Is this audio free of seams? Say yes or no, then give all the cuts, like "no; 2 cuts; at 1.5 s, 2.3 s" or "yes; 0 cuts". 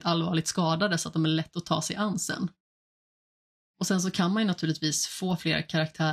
yes; 0 cuts